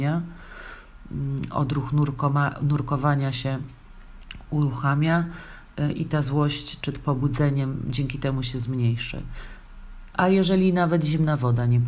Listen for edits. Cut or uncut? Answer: cut